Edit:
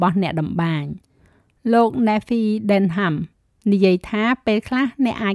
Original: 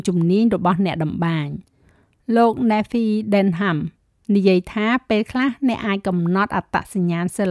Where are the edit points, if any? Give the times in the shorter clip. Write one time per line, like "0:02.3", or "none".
none